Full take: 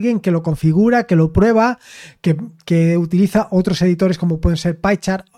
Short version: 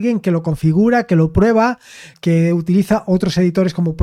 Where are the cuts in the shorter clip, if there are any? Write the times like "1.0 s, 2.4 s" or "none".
2.1 s